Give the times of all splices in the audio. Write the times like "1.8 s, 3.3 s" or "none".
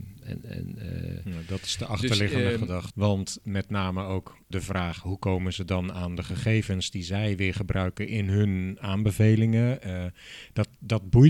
2.9 s, 4.5 s